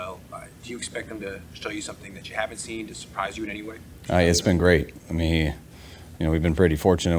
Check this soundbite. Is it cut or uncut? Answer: cut